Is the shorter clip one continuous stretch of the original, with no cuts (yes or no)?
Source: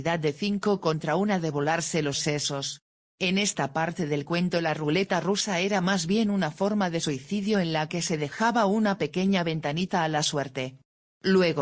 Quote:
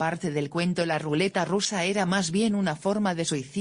yes